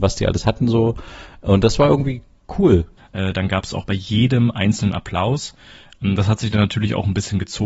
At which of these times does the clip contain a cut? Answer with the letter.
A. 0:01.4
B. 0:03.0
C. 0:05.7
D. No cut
B